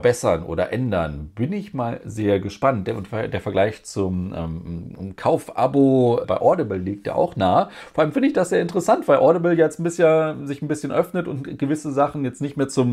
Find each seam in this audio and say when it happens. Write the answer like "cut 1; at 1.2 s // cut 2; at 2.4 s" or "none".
cut 1; at 6.2 s